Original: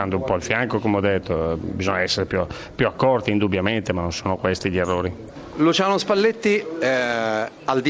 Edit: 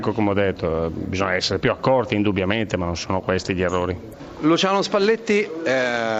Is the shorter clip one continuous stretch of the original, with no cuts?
no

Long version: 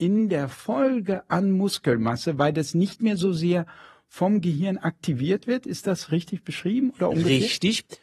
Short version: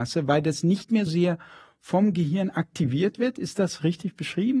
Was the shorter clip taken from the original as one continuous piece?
no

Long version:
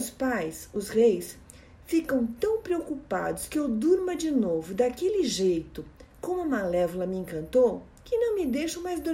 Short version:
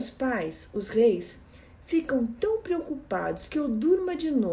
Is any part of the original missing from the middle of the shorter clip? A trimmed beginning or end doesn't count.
no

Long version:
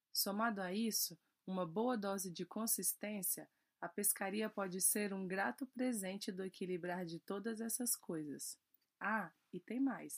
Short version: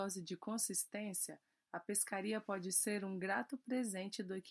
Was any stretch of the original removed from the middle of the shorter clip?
no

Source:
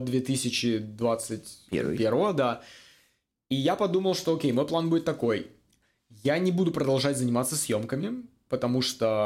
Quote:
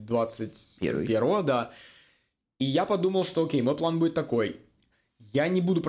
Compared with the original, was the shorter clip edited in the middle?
no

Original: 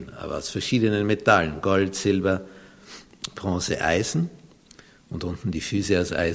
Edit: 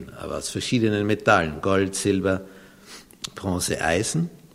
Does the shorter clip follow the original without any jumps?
yes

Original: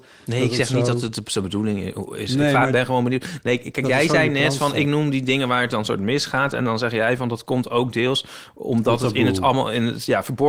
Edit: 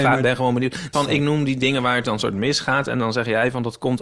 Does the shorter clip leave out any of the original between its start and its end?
yes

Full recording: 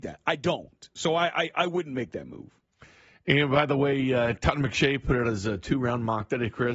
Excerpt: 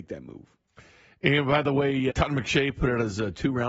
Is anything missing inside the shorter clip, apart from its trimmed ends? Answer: yes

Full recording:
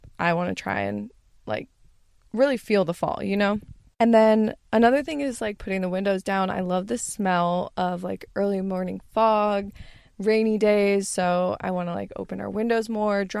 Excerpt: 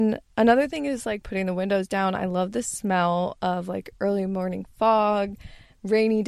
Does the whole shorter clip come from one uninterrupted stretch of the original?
yes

